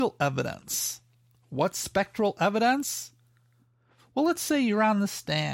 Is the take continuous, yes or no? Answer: yes